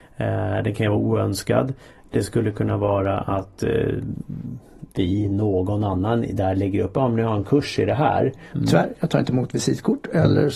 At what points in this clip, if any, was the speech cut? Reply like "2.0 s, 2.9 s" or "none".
8.5 s